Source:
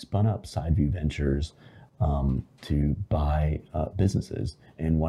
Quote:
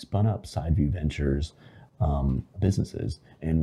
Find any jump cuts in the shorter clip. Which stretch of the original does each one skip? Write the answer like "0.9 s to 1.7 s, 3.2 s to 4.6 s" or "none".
2.5 s to 3.9 s